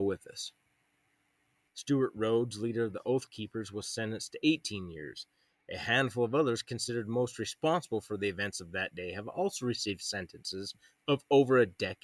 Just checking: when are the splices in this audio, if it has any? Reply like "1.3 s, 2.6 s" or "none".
1.7 s